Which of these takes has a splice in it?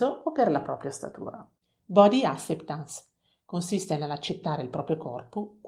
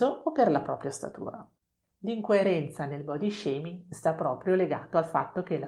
first; 1 cut; at 1.6 s

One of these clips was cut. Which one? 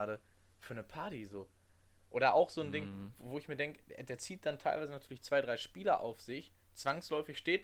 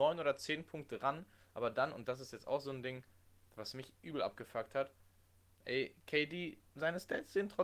second; 1 cut; at 6.7 s

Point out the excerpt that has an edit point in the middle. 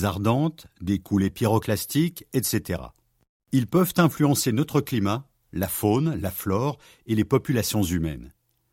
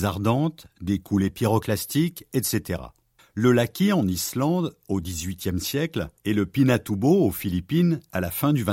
second; 2 cuts; at 3.2 s, 6.2 s

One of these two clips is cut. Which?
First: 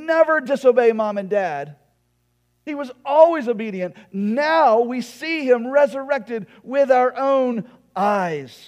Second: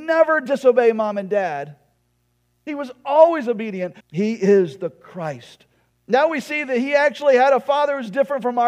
second; 2 cuts; at 4.0 s, 5.9 s

